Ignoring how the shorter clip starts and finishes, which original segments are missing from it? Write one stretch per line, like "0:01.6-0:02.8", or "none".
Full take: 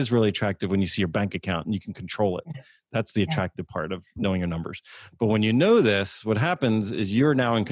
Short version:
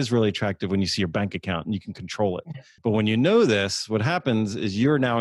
0:02.8-0:05.1